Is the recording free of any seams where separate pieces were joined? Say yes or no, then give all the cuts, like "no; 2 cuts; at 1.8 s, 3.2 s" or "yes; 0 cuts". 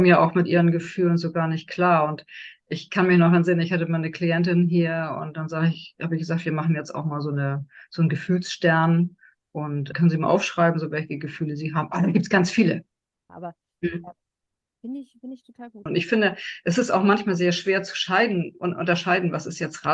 no; 3 cuts; at 9.9 s, 13.3 s, 15.9 s